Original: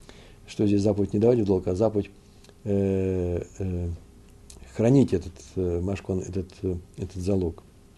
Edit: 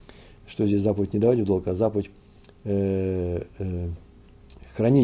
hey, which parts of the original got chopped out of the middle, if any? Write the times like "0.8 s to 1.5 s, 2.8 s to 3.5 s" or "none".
none